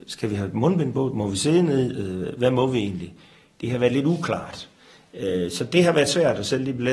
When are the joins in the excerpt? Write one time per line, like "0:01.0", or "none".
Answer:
none